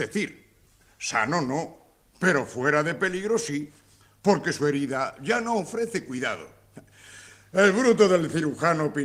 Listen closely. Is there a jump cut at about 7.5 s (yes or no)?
no